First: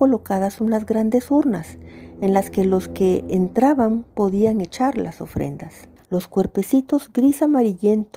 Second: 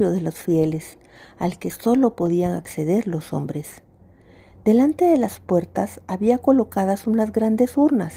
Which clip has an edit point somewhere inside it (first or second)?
first